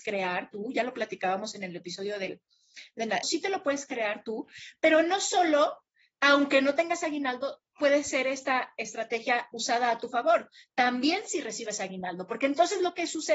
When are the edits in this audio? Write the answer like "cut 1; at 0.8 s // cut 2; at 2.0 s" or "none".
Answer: cut 1; at 3.2 s